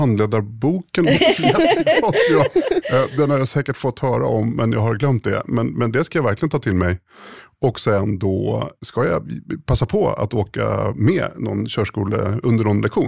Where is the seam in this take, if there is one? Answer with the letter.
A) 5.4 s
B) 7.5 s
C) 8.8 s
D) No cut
C